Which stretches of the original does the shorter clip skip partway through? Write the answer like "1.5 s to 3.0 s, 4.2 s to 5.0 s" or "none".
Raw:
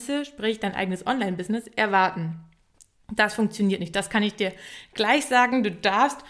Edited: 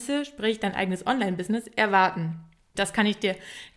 2.8 s to 3.9 s